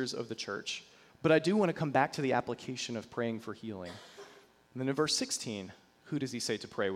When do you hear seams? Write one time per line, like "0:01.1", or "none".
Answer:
0:01.1
0:04.7